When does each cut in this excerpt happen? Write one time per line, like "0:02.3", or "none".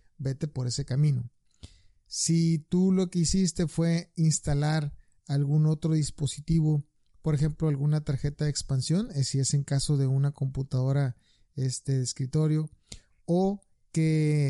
none